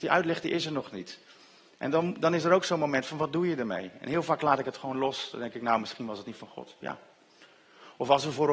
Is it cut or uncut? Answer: uncut